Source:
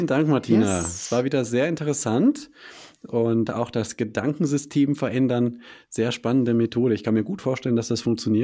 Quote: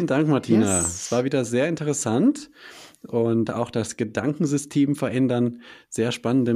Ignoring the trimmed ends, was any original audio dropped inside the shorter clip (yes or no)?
no